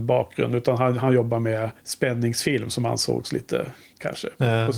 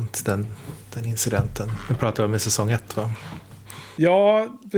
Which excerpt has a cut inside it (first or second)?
first